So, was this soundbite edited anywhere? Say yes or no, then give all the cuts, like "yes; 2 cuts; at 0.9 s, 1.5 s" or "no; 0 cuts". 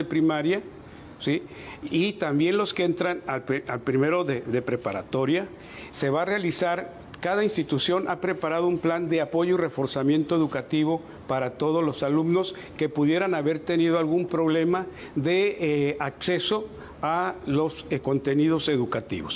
no; 0 cuts